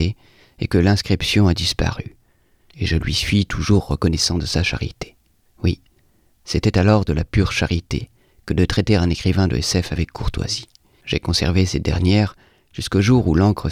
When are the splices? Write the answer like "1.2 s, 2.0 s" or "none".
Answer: 11.0 s